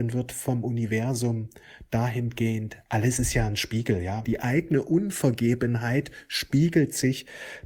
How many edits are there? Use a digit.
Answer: 1